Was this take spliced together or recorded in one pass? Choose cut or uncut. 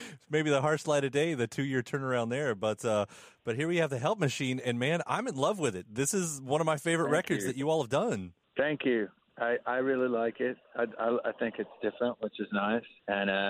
uncut